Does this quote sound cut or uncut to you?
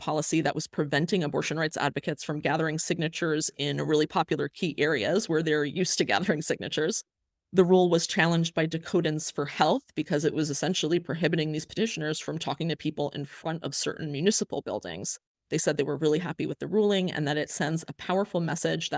uncut